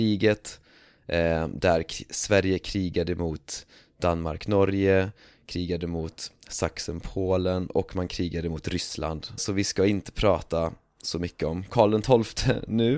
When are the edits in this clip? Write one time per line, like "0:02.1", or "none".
0:09.4